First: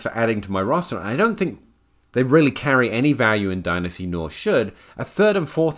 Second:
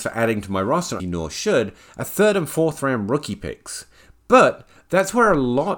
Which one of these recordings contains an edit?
second; 1 cut; at 1.0 s

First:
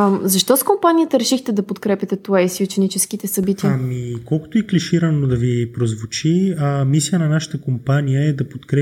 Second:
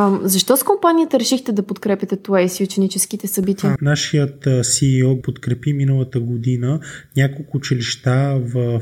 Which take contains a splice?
second; 2 cuts; at 3.8 s, 5.2 s

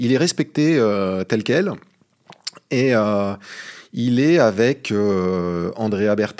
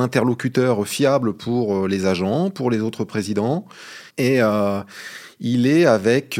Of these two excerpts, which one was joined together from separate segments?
second; 1 cut; at 4.1 s

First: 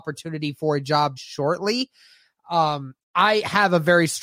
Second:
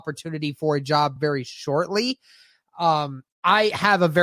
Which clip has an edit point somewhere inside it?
first; 1 cut; at 1.2 s

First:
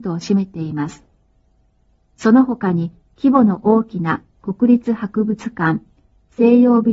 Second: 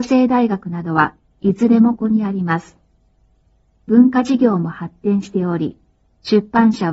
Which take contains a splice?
second; 1 cut; at 2.0 s

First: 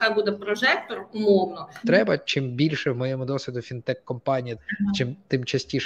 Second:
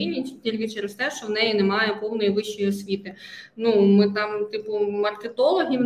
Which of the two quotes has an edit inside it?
first; 2 cuts; at 1.8 s, 4.6 s

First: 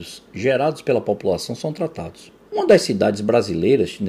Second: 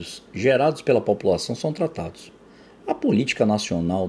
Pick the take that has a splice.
first; 1 cut; at 2.5 s

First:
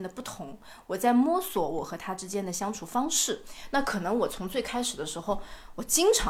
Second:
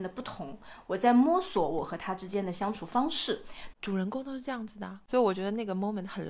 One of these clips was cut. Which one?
second; 1 cut; at 3.7 s

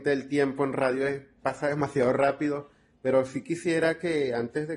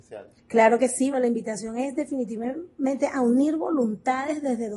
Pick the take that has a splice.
second; 1 cut; at 1.1 s

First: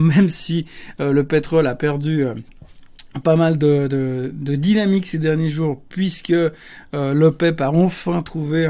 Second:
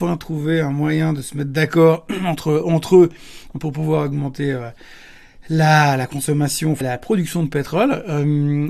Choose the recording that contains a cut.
second; 1 cut; at 6.8 s

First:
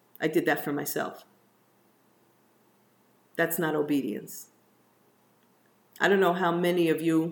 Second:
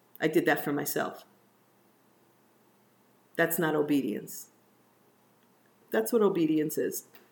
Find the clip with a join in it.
second; 1 cut; at 5.8 s

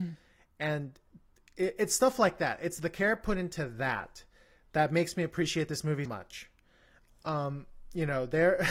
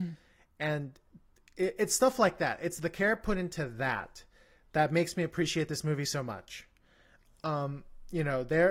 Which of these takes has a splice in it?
first; 1 cut; at 6.1 s

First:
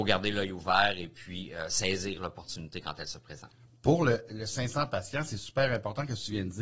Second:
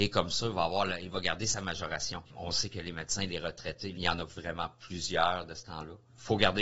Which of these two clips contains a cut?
second; 2 cuts; at 2.3 s, 3.9 s

